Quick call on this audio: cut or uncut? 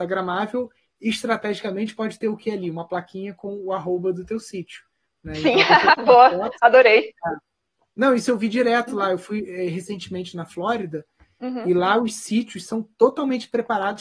uncut